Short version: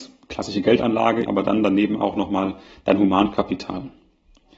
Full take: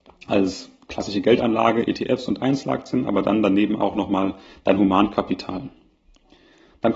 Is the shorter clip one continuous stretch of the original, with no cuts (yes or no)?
no